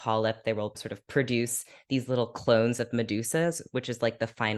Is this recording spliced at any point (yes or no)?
no